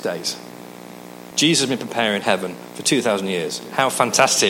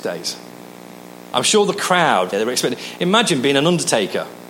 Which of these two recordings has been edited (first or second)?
second